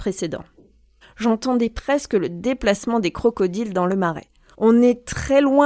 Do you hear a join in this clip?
yes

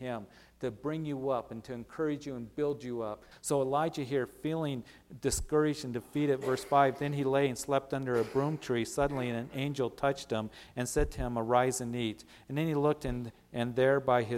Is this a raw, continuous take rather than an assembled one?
no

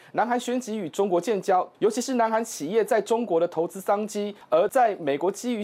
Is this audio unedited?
no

